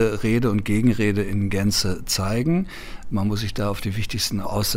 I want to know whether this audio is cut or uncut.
uncut